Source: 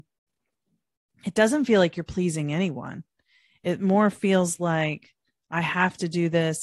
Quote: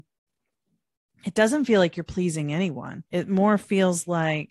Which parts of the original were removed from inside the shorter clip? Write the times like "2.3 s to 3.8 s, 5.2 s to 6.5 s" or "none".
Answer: 3.1 s to 3.6 s